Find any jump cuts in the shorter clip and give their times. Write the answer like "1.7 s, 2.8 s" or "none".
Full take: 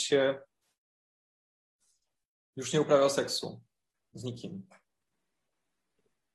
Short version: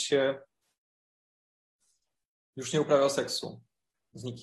none